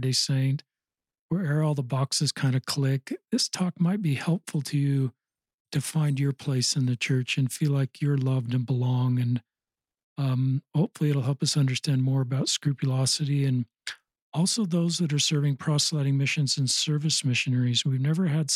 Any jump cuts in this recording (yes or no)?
no